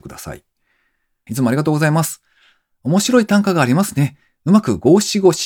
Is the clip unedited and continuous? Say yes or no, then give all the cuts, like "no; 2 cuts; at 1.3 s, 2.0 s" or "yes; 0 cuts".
no; 1 cut; at 1.3 s